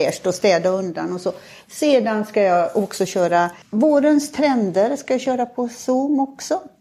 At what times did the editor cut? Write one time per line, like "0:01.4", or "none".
none

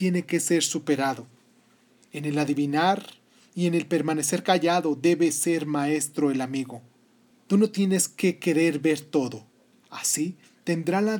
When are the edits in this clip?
0:09.8

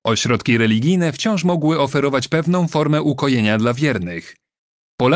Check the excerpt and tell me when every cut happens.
none

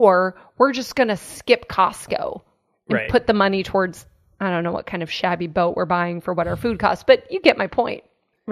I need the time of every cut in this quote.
none

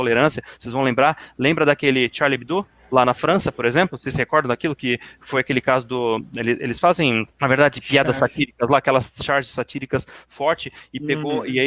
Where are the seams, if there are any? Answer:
0:07.3

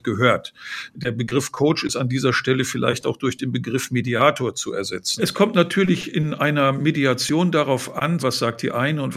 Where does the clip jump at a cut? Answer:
0:05.2
0:08.2

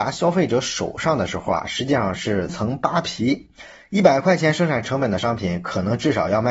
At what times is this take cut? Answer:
0:02.5

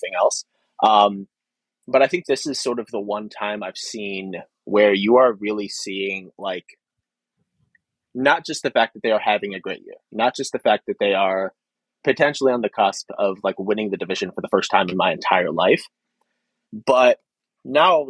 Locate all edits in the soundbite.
0:16.7

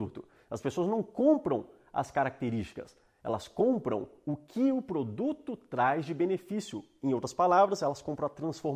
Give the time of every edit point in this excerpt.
none

